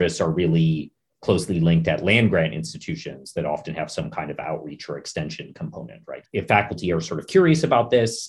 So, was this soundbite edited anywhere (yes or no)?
yes